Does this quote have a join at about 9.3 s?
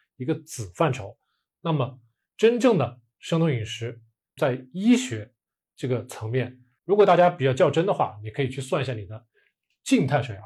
no; 2 cuts; at 4.4 s, 6.8 s

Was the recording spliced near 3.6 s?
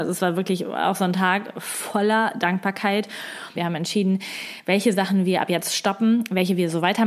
yes; 1 cut; at 3.6 s

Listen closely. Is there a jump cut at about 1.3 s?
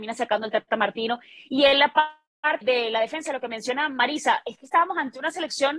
no; 1 cut; at 2.6 s

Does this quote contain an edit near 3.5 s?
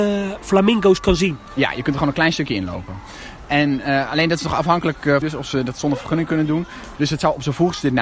no; 2 cuts; at 5.2 s, 7.0 s

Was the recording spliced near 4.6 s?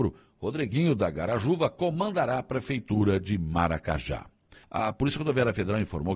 yes; 1 cut; at 4.6 s

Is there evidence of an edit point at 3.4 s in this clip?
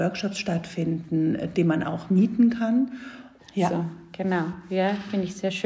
yes; 1 cut; at 3.4 s

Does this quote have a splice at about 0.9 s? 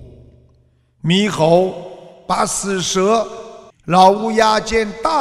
no; 1 cut; at 3.7 s

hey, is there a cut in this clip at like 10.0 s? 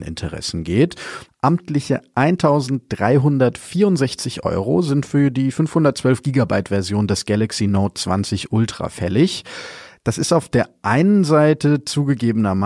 yes; 2 cuts; at 1.3 s, 10.0 s

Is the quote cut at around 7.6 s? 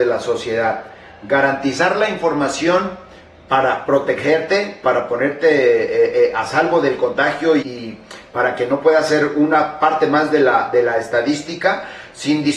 yes; 1 cut; at 7.6 s

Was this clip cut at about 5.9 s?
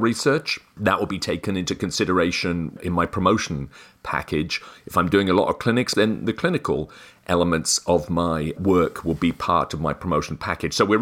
yes; 1 cut; at 5.9 s

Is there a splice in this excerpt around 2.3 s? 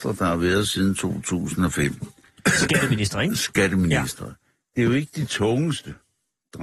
no; 0 cuts

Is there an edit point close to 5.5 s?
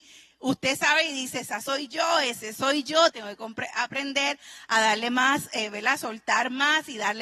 no; 1 cut; at 3.1 s

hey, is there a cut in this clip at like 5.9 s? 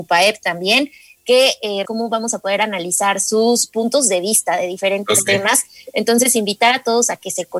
no; 1 cut; at 1.8 s

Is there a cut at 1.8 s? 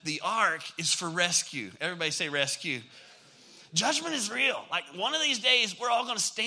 no; 0 cuts

